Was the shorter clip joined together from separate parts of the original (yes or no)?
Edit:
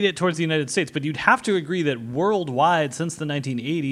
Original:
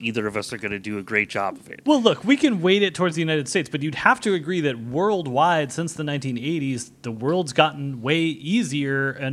no